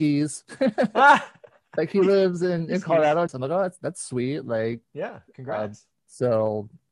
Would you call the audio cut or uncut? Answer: cut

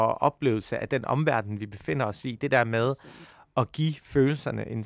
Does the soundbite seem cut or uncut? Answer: uncut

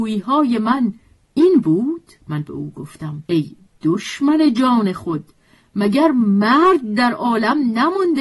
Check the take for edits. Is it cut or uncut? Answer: cut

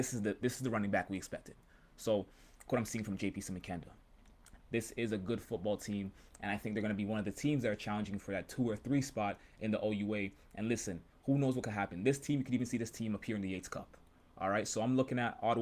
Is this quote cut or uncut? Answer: cut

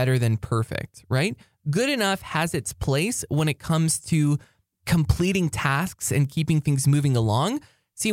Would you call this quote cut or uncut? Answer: uncut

